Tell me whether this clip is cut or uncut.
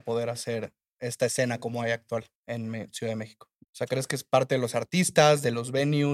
cut